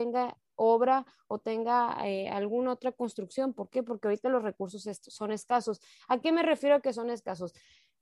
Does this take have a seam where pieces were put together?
no; 0 cuts

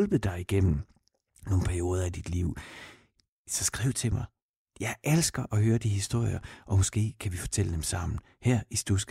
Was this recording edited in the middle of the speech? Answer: no; 0 cuts

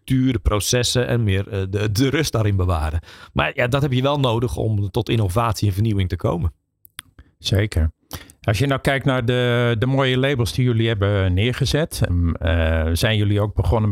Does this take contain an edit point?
yes; 1 cut; at 12.1 s

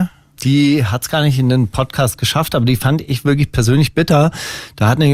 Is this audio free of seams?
yes; 0 cuts

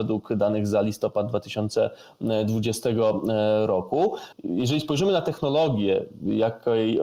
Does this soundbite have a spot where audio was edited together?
yes; 1 cut; at 4.3 s

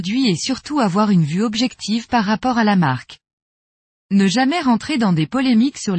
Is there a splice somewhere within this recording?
no; 0 cuts

